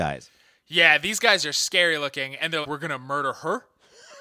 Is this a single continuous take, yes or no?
no